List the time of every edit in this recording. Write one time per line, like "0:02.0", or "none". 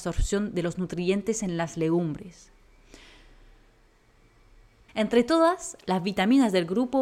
0:04.9